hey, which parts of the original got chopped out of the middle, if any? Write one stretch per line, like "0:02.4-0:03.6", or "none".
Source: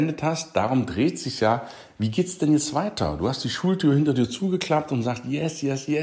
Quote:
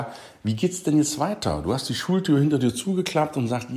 none

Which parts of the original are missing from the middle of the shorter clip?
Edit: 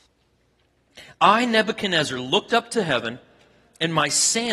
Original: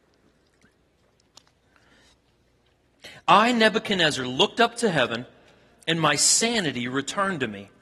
none

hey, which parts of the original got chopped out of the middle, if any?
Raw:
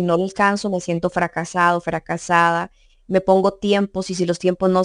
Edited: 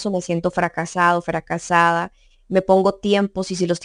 none

